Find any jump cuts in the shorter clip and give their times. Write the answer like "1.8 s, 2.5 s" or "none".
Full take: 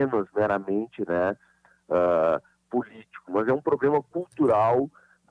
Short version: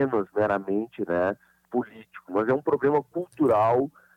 1.6 s